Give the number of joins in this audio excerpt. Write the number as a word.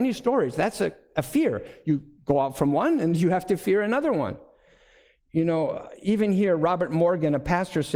one